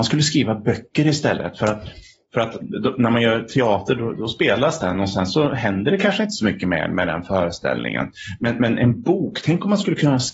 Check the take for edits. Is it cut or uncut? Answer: cut